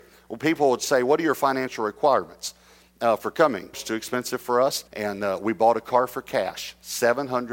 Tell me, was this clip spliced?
yes; 2 cuts; at 3.7 s, 4.9 s

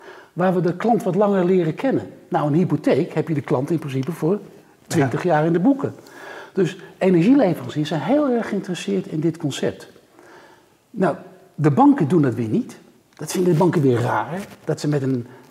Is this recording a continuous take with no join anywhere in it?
yes; 0 cuts

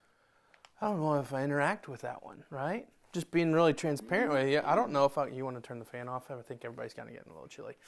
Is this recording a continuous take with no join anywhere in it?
no; 1 cut; at 2.5 s

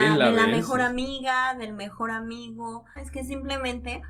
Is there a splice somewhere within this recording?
yes; 1 cut; at 3.0 s

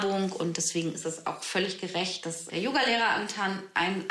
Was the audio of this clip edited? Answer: yes; 1 cut; at 2.5 s

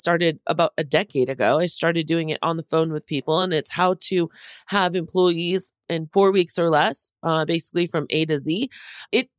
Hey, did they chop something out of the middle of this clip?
no; 0 cuts

